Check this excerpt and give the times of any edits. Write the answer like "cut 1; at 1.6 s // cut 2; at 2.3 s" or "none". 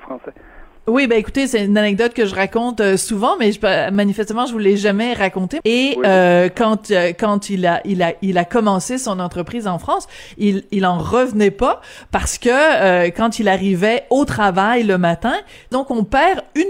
cut 1; at 5.6 s // cut 2; at 15.7 s